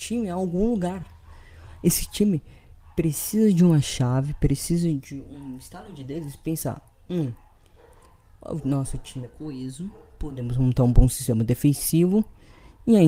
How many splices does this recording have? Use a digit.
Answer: 0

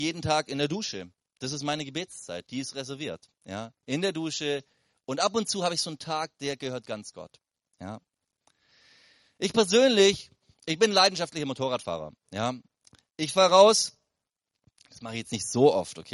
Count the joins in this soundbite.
0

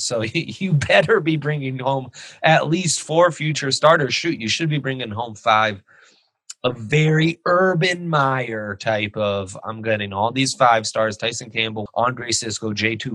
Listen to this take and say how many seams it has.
1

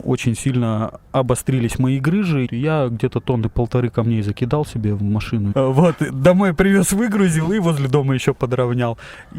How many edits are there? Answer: 2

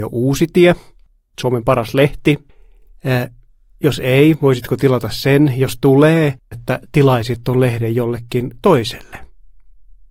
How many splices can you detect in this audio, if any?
1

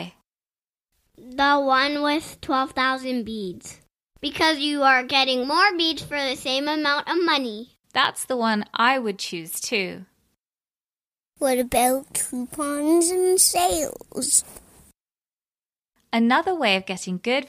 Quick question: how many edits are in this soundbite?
1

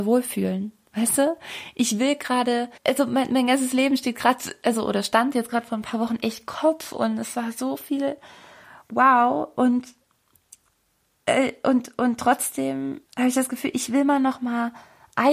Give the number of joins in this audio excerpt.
2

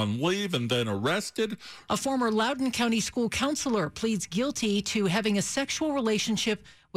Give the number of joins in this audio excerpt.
1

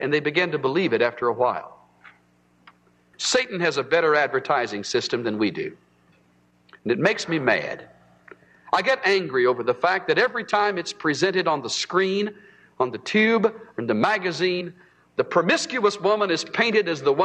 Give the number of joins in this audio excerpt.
1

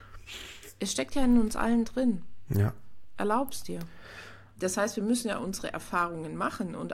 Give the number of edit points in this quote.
1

